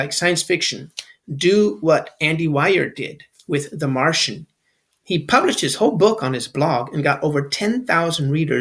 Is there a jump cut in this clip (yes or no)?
no